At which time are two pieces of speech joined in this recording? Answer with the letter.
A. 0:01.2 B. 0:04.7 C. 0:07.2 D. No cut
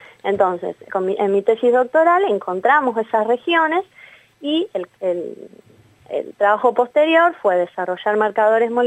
D